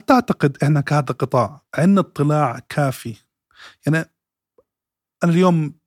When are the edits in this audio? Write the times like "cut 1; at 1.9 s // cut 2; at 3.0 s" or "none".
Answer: cut 1; at 1.7 s